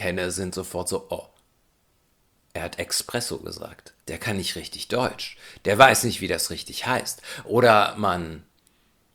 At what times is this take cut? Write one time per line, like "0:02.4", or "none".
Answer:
0:04.0